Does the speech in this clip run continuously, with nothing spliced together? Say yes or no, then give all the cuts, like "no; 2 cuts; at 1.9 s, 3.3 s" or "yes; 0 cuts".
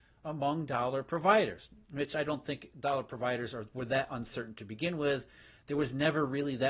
yes; 0 cuts